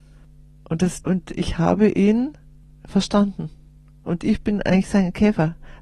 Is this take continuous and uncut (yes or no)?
no